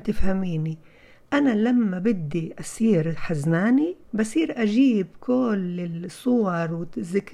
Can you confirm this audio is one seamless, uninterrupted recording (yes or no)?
no